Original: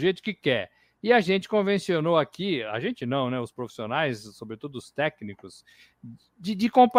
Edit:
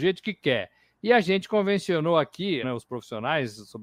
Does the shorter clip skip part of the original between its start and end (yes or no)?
yes